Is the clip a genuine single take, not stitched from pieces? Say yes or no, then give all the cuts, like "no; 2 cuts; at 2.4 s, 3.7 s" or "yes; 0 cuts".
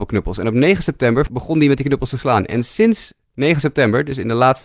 no; 1 cut; at 1.3 s